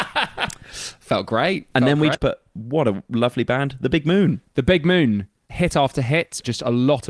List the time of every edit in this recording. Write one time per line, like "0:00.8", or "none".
0:02.1